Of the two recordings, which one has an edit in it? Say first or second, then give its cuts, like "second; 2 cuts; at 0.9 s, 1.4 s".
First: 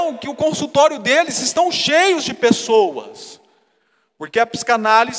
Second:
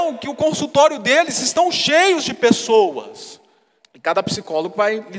second; 1 cut; at 3.8 s